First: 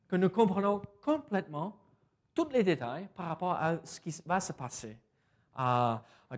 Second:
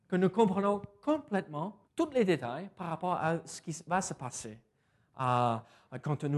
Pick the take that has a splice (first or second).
second